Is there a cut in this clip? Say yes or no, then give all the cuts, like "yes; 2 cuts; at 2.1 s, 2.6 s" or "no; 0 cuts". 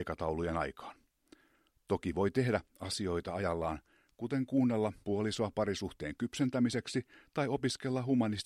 yes; 1 cut; at 5.0 s